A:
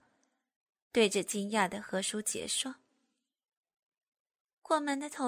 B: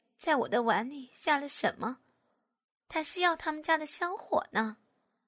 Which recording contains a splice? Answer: B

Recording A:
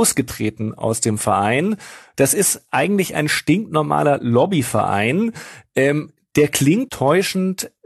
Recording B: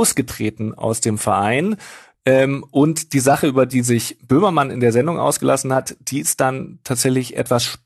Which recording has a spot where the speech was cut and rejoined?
A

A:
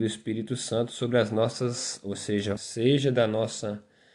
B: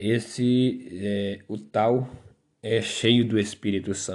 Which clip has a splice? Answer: A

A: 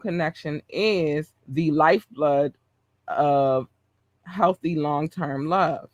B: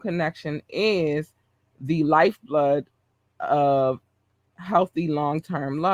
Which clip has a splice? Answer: A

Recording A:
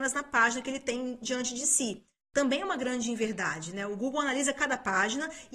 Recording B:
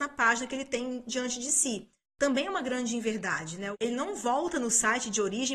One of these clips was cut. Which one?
B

